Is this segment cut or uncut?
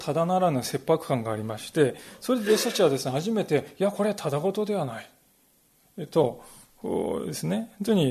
uncut